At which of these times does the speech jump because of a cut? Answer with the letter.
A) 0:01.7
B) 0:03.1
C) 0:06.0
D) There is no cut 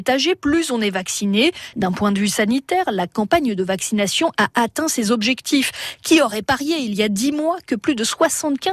A